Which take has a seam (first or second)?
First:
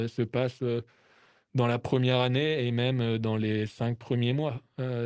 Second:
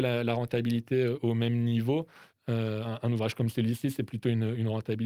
second